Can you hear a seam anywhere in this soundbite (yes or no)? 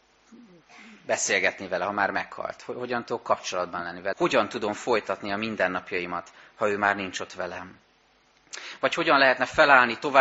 yes